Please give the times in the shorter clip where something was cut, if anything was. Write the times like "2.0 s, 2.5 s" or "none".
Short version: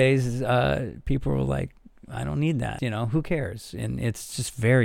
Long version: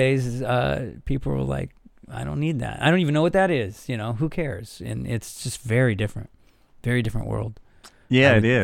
2.8 s